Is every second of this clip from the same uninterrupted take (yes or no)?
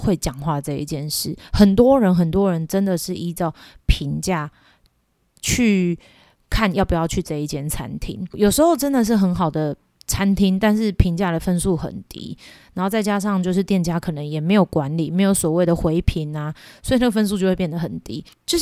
yes